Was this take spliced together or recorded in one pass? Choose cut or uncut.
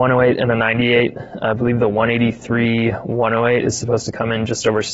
uncut